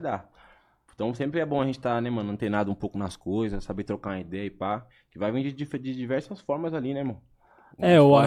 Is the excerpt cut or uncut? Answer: uncut